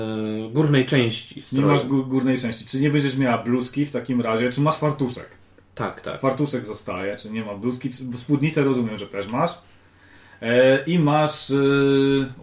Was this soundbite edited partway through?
no; 0 cuts

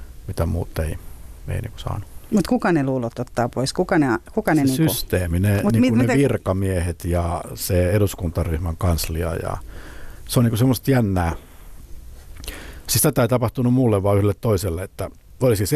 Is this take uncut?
yes; 0 cuts

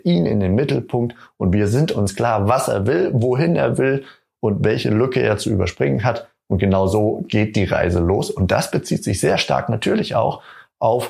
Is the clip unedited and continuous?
yes; 0 cuts

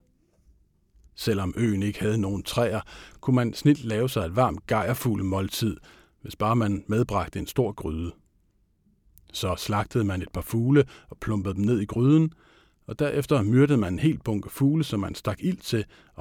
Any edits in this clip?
no; 0 cuts

